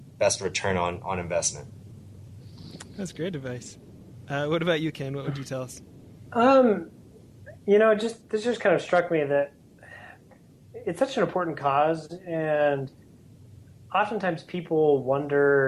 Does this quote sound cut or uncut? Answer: uncut